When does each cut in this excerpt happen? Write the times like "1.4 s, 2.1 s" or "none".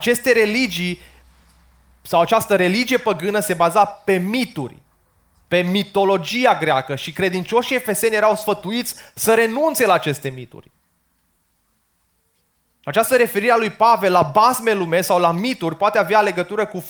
none